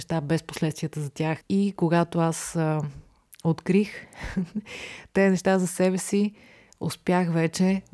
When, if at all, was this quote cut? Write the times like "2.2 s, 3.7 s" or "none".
1.4 s